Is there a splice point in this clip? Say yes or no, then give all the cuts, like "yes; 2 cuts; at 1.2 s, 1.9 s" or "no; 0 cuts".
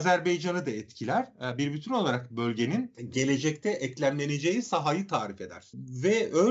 no; 0 cuts